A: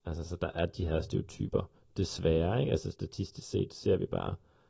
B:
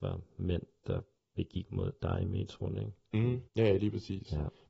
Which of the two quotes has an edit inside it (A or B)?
B